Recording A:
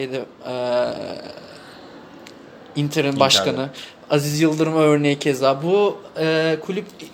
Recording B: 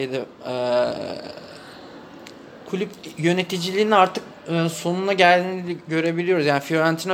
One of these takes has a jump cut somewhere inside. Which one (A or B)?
B